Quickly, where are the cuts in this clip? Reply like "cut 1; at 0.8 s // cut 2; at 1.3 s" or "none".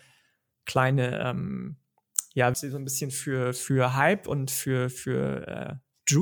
cut 1; at 2.5 s